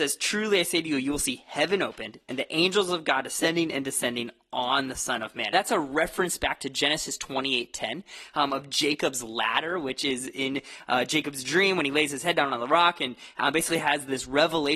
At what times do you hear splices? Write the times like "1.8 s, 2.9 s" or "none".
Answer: 5.5 s